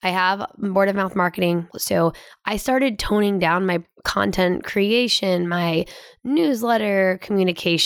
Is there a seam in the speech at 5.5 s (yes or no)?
no